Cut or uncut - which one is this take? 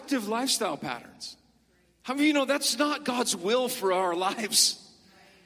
uncut